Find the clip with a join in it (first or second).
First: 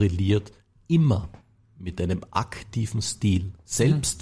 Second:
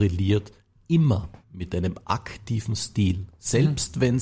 second